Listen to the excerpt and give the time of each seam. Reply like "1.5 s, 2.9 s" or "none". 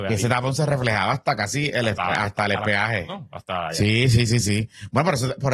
4.3 s